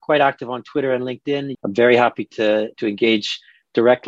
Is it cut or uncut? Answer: cut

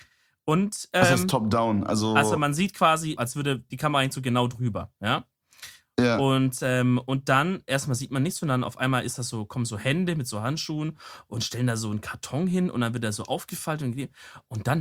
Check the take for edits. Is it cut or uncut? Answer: cut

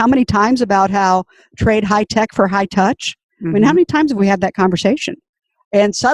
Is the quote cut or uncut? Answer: uncut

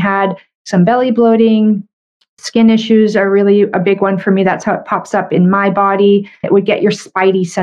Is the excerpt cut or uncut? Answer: cut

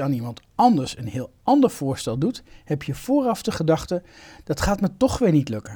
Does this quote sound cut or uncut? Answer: uncut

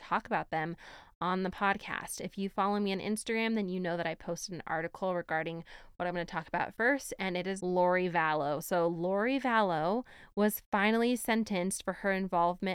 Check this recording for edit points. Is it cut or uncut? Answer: cut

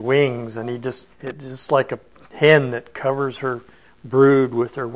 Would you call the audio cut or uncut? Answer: cut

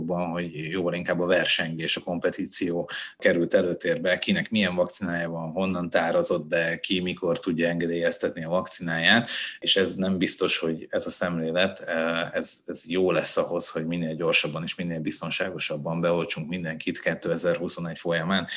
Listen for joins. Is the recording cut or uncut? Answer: uncut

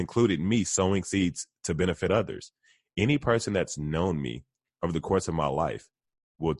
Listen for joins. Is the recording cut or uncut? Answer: uncut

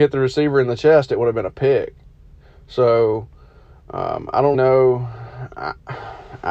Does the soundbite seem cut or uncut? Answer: cut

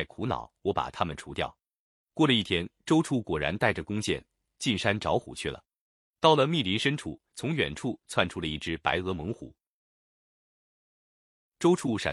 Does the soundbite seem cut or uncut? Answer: cut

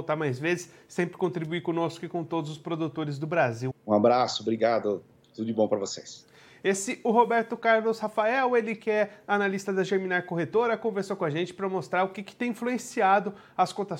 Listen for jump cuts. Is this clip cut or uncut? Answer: cut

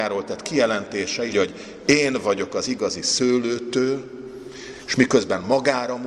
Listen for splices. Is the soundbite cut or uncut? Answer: cut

